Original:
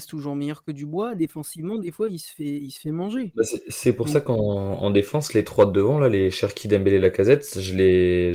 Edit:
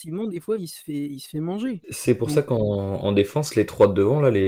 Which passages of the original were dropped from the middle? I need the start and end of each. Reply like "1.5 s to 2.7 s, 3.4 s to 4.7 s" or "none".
3.4 s to 3.6 s